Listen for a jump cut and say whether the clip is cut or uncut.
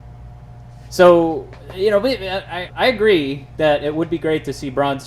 cut